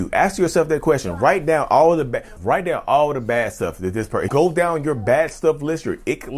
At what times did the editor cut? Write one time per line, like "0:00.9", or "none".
0:02.4
0:04.3